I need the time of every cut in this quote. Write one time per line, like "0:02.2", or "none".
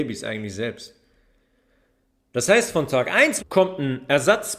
0:03.4